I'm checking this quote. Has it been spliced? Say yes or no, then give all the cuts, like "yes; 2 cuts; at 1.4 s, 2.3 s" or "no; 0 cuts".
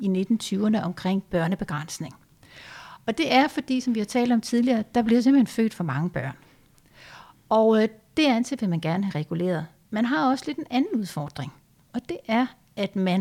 no; 0 cuts